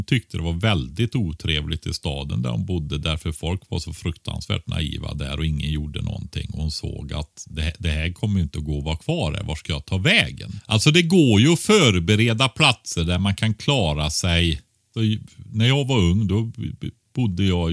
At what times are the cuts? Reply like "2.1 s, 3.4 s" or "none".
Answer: none